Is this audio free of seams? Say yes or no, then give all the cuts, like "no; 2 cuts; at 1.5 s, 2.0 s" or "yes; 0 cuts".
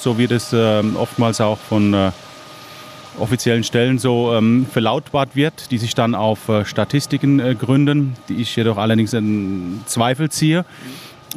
yes; 0 cuts